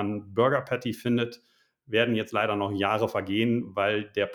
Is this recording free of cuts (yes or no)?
yes